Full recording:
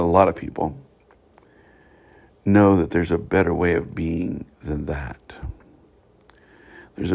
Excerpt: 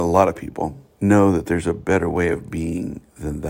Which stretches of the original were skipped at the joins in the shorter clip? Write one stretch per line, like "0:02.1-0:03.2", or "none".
0:00.9-0:02.4